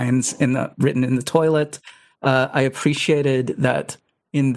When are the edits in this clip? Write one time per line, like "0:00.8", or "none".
0:02.1